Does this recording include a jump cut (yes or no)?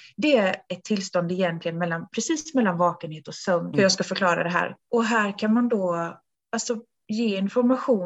yes